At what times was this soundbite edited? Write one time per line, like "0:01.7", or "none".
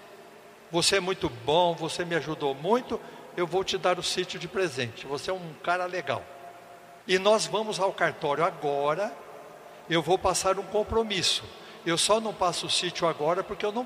0:07.0